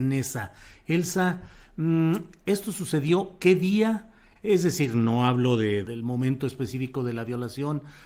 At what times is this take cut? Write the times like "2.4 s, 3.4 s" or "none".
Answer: 4.4 s, 5.8 s